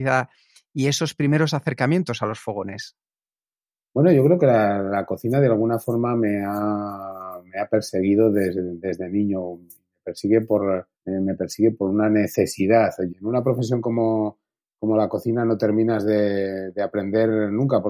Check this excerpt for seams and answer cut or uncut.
cut